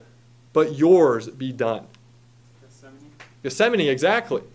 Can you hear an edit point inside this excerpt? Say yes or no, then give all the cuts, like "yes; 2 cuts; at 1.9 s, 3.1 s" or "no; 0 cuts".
yes; 1 cut; at 2.5 s